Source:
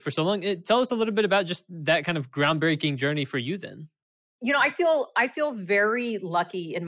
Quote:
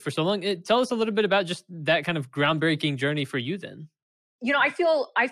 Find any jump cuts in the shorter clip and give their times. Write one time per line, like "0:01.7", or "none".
none